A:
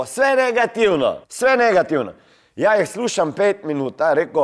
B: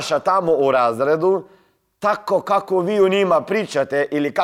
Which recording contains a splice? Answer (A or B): A